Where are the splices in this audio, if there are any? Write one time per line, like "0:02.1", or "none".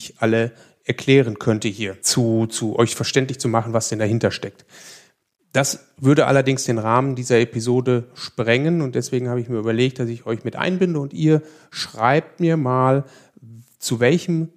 0:02.0